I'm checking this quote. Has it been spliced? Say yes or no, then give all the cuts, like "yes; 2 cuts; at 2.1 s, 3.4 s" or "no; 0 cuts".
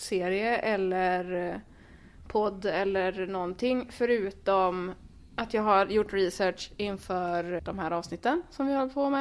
yes; 1 cut; at 7.6 s